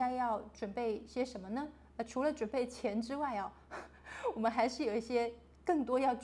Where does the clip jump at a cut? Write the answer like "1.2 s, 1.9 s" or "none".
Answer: none

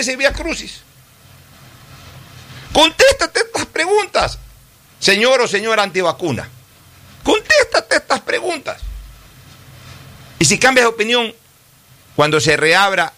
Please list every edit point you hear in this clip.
none

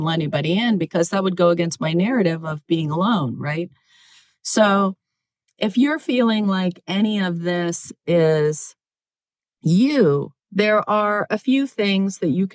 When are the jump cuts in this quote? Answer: 10.4 s

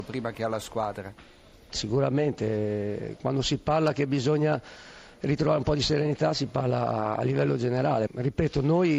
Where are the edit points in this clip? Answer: 1.7 s, 8.1 s

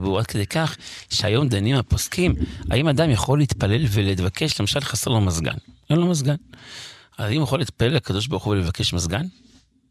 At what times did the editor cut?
none

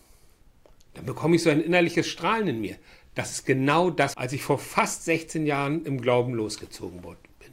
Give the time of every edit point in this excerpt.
4.1 s

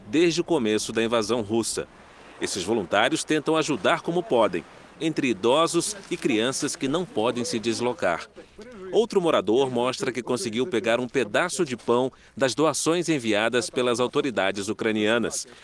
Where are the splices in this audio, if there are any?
4.9 s

